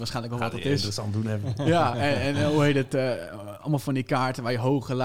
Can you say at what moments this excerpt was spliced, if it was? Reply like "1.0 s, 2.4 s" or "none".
none